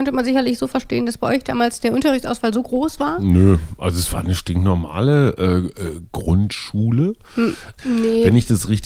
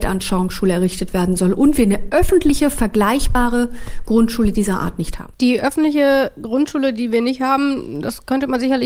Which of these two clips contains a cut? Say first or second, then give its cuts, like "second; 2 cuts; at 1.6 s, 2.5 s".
first; 1 cut; at 7.8 s